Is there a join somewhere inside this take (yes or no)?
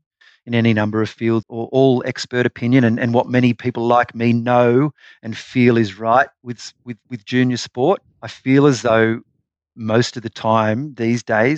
yes